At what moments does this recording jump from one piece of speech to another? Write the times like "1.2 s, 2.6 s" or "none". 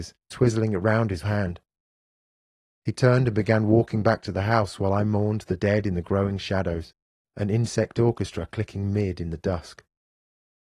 1.2 s